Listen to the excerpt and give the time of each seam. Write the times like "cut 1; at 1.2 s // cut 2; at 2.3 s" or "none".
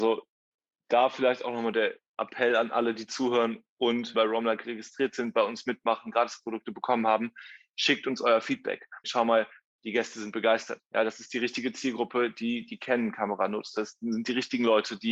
cut 1; at 4.1 s // cut 2; at 9.0 s